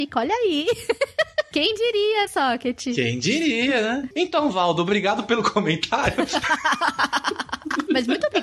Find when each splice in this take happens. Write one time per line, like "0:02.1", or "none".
0:02.3
0:04.1